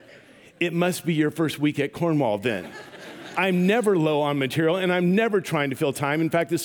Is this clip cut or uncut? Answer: uncut